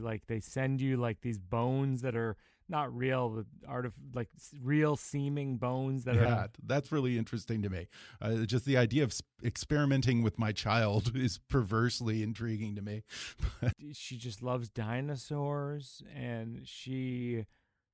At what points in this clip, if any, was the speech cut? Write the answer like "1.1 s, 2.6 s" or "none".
6.3 s, 13.7 s